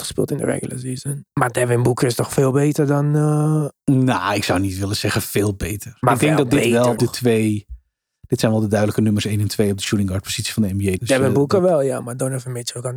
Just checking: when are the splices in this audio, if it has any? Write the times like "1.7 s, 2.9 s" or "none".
7.0 s, 11.0 s